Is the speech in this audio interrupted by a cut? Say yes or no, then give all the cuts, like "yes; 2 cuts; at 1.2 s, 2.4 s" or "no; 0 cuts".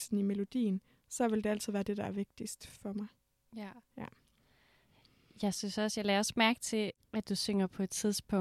no; 0 cuts